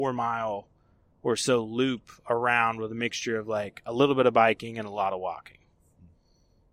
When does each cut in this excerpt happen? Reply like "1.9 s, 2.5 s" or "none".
none